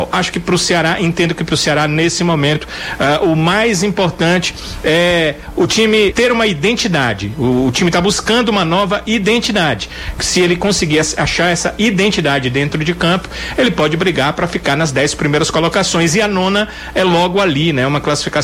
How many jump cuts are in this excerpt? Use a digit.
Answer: 1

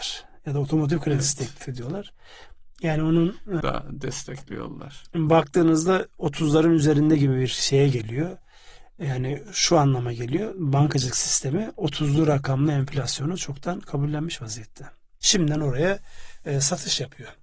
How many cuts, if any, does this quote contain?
2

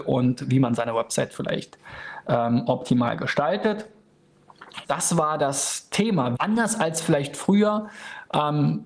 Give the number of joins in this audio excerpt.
2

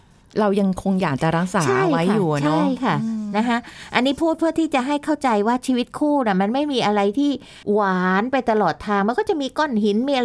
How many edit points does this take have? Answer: 1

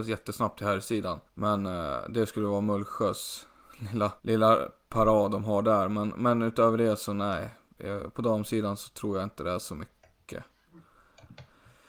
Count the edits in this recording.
2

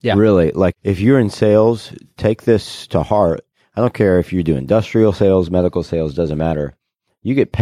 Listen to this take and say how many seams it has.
0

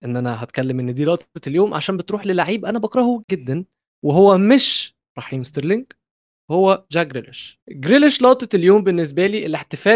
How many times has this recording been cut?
2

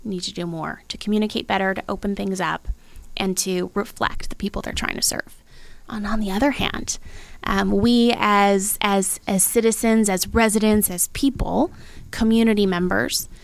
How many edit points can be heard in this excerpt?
1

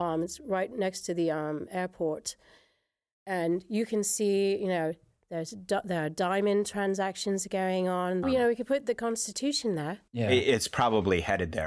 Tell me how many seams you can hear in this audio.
2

